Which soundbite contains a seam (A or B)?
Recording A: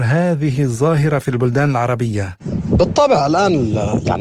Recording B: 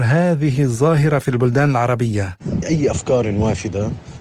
B